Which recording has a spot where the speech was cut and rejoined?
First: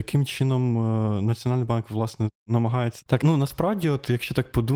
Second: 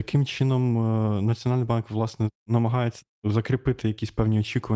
first; 1 cut; at 3.1 s

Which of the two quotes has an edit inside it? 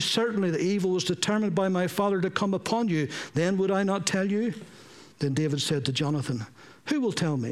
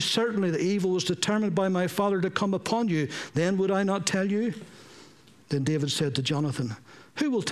first; 1 cut; at 5.1 s

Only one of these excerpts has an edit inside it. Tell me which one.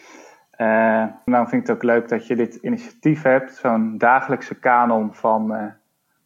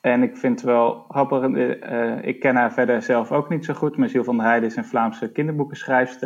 first; 1 cut; at 1.3 s

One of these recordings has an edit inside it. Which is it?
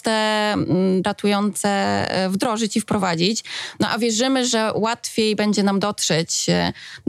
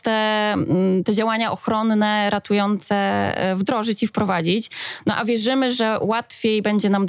first; 1 cut; at 1.0 s

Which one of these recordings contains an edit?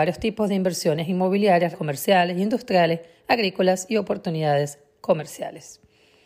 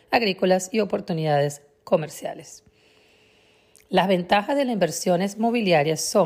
first; 1 cut; at 1.7 s

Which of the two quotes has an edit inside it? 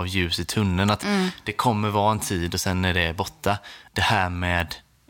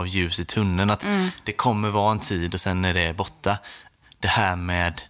first; 1 cut; at 3.9 s

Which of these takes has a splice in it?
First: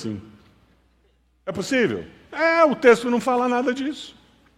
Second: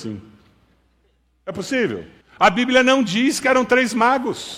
second; 1 cut; at 2.2 s

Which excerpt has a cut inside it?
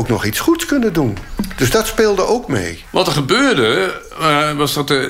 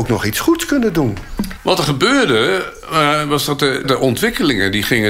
second; 2 cuts; at 1.6 s, 3.8 s

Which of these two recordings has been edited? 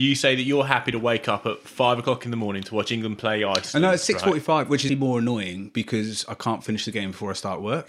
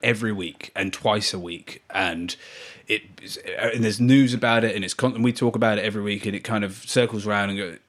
first; 1 cut; at 4.9 s

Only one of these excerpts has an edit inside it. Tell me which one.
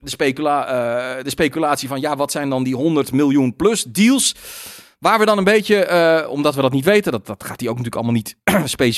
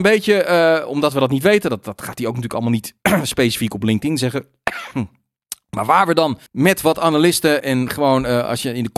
second; 2 cuts; at 6.5 s, 7.6 s

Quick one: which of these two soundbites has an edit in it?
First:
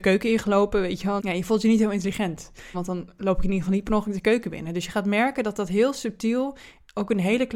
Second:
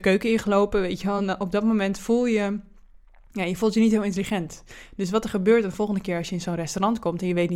first; 2 cuts; at 1.2 s, 2.7 s

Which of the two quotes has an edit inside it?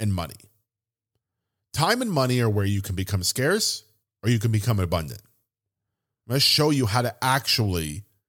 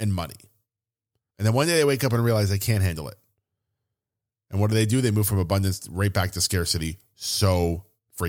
second; 1 cut; at 1.3 s

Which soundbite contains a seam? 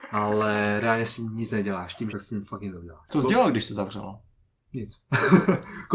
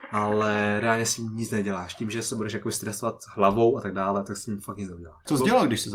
first; 1 cut; at 2.1 s

